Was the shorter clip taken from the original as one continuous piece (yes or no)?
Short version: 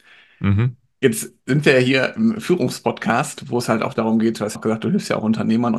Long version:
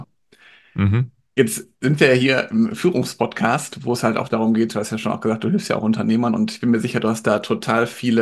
no